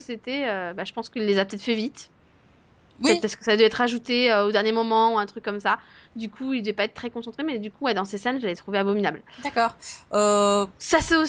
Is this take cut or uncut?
uncut